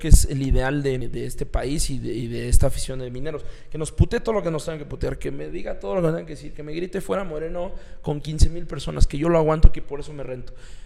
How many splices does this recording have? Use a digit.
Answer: 1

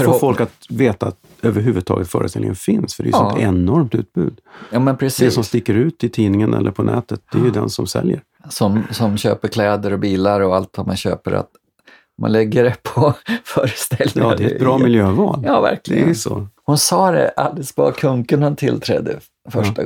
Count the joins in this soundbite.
2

